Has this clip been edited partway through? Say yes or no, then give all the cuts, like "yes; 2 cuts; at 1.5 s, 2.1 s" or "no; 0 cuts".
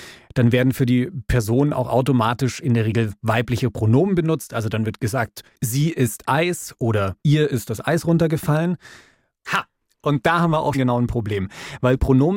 yes; 3 cuts; at 7.2 s, 9.4 s, 10.7 s